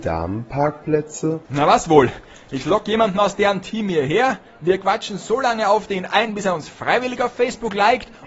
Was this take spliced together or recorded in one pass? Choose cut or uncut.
cut